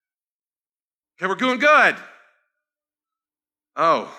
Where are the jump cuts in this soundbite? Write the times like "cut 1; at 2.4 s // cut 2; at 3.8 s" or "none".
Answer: none